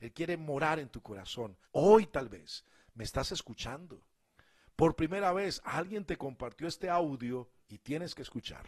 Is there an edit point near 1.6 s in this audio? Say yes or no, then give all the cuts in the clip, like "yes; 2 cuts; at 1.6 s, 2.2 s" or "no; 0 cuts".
yes; 1 cut; at 1.6 s